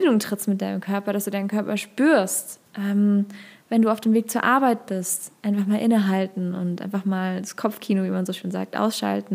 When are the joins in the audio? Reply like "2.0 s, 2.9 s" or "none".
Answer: none